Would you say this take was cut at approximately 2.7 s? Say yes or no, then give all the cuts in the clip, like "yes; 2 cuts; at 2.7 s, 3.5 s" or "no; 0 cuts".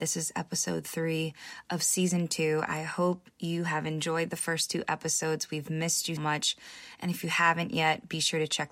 no; 1 cut; at 6.2 s